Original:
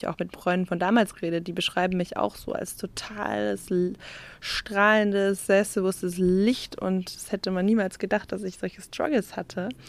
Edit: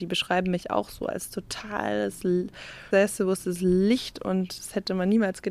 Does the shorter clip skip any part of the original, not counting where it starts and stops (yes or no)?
yes